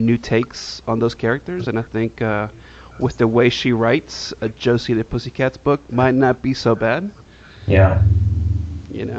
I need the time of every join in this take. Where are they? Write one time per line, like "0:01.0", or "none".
none